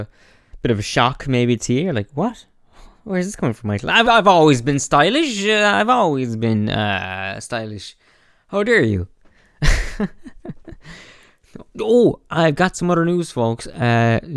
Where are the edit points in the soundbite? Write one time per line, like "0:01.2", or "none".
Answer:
0:04.0

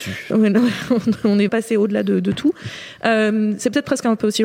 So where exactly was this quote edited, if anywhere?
0:01.5

